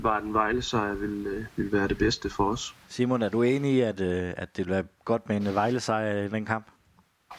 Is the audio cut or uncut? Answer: cut